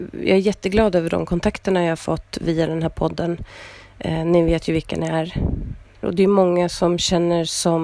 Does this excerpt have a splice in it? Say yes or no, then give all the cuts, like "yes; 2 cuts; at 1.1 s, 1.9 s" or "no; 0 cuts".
yes; 1 cut; at 6.0 s